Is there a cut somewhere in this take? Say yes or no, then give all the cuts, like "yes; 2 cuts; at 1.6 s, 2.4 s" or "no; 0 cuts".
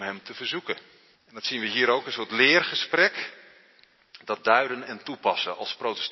yes; 1 cut; at 1.2 s